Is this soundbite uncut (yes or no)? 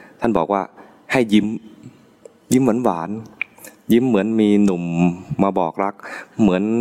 yes